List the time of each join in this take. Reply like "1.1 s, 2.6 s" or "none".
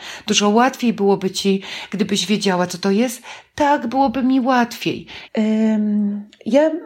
5.3 s